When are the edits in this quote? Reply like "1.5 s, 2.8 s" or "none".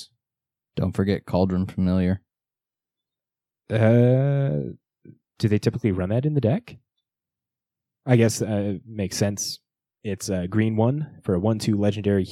9.9 s

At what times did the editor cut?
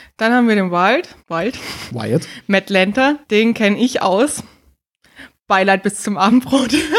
1.2 s, 3.2 s

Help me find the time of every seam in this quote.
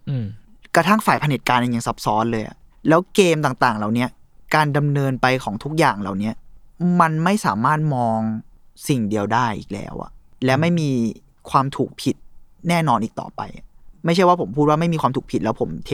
none

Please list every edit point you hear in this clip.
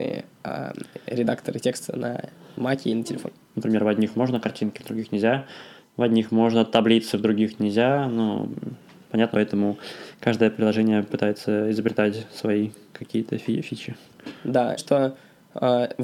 3.5 s, 9.3 s, 14.8 s

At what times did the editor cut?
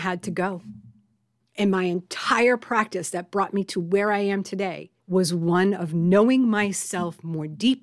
1.4 s, 5.0 s

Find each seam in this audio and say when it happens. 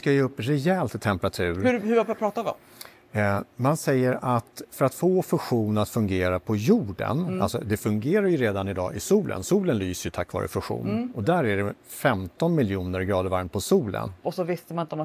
14.1 s

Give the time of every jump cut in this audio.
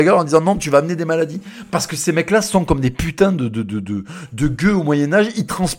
none

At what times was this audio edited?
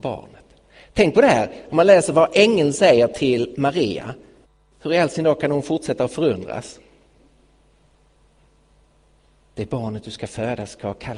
none

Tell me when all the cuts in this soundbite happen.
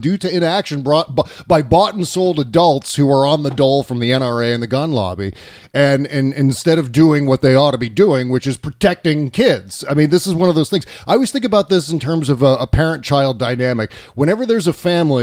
none

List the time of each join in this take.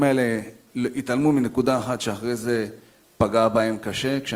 none

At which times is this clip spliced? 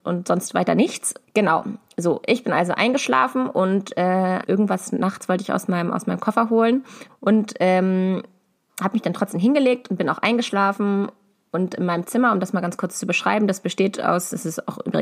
1.2 s, 4.4 s, 7.1 s

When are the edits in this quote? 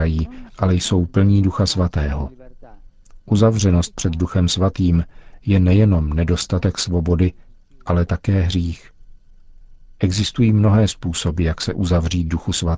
none

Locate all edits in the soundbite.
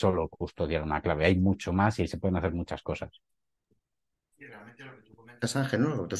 none

